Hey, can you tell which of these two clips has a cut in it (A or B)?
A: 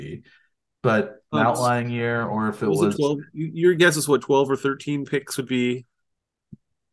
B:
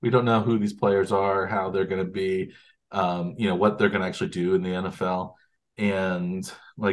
A